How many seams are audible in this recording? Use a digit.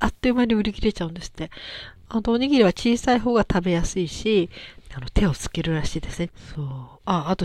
2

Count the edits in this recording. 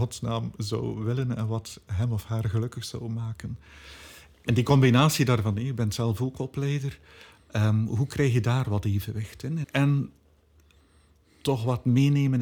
1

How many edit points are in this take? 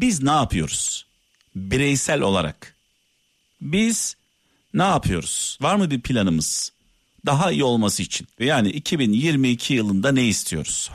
2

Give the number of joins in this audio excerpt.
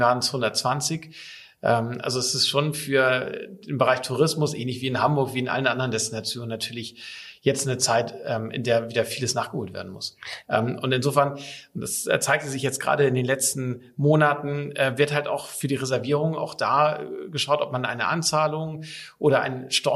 1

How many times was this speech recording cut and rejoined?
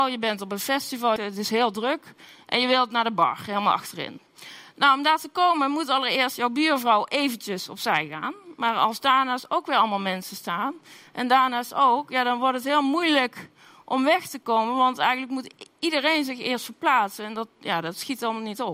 1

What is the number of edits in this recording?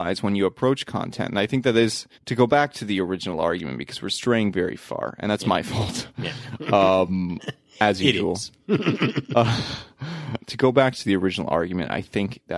2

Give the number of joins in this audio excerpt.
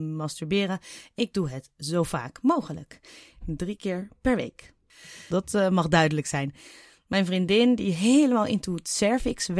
1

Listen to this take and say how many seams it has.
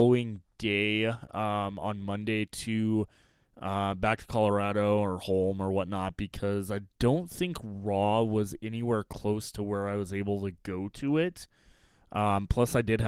0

